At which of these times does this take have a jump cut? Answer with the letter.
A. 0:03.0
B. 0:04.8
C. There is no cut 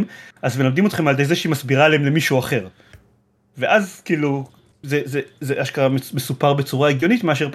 B